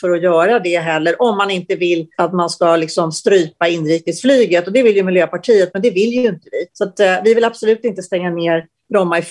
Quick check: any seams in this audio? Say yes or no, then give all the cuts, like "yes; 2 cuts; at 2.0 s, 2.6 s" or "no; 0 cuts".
yes; 2 cuts; at 2.1 s, 6.7 s